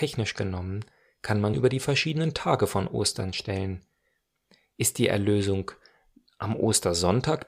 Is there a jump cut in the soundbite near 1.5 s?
yes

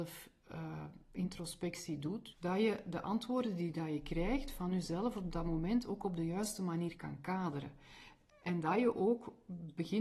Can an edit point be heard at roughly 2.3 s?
yes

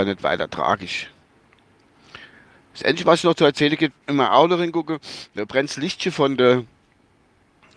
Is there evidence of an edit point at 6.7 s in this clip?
no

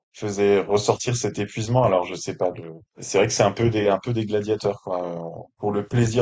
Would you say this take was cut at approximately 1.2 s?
no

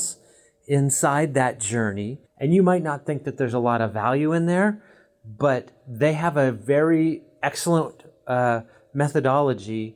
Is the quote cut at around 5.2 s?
no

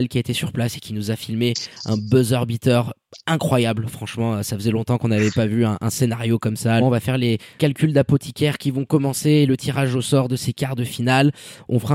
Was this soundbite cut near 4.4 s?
no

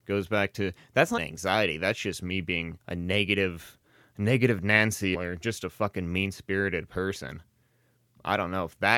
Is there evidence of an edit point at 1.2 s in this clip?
yes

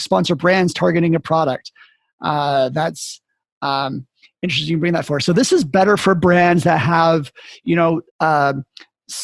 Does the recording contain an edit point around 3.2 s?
no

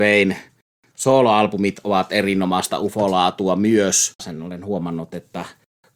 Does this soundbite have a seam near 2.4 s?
no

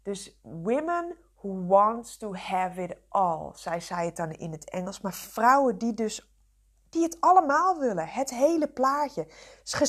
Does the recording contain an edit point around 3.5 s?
no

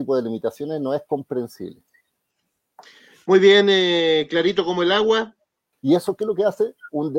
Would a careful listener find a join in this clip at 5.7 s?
yes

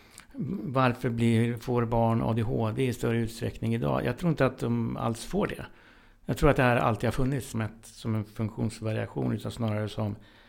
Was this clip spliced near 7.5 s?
yes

